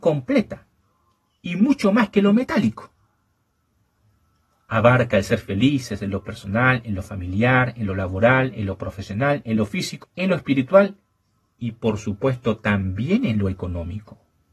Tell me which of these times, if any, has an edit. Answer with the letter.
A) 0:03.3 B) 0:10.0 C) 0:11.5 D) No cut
B